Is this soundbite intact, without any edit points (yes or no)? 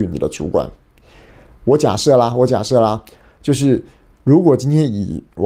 yes